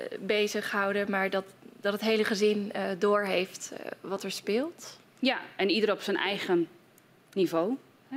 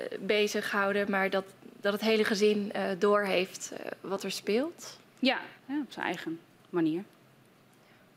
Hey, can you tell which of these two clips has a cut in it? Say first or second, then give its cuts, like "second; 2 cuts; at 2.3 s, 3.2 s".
second; 1 cut; at 5.6 s